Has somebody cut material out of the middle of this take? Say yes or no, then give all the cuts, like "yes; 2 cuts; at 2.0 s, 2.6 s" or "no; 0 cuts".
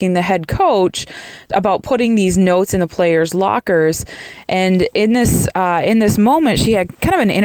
no; 0 cuts